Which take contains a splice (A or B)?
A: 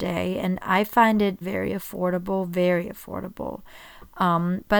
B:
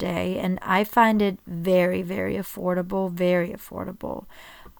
A